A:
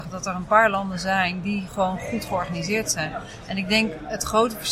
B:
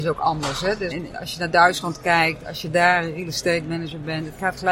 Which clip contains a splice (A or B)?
B